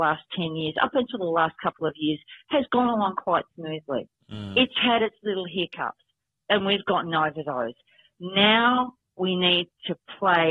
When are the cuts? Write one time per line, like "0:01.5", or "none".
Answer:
none